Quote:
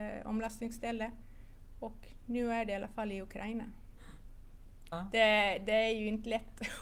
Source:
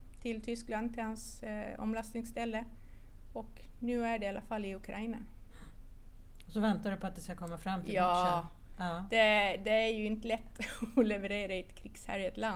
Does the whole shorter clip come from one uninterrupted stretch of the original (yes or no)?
no